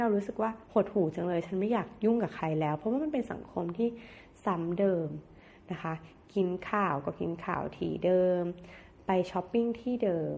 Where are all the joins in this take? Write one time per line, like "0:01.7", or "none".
none